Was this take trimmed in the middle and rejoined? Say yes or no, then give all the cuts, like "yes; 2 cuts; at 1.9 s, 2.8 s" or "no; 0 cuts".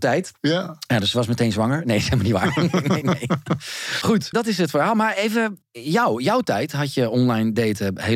yes; 2 cuts; at 3.0 s, 4.3 s